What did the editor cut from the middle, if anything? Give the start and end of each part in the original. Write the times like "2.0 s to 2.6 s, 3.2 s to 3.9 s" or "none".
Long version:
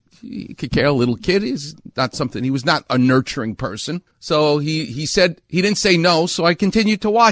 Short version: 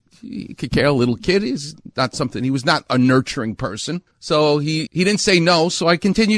4.9 s to 5.4 s